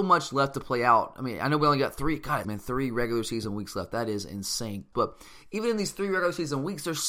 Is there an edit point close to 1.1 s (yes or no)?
no